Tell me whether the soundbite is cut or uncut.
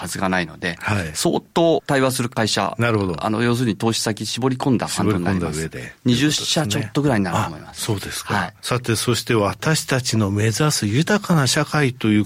uncut